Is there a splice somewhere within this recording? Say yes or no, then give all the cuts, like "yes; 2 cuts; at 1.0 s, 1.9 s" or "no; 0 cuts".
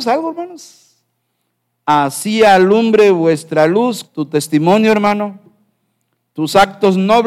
yes; 1 cut; at 4.0 s